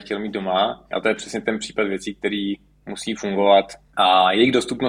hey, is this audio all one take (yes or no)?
yes